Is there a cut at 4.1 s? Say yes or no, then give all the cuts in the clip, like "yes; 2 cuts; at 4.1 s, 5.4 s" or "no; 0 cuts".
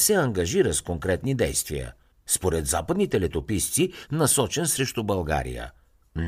yes; 2 cuts; at 2.1 s, 4.1 s